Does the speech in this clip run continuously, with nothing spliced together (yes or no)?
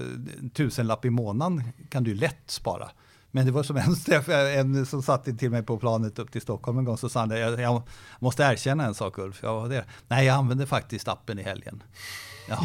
yes